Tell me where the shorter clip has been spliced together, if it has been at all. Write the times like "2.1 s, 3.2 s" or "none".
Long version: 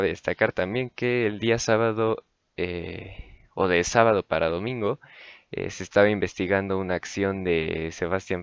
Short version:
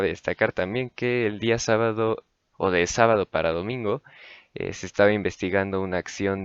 2.5 s